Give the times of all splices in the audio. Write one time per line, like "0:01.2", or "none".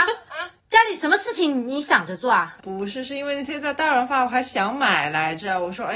none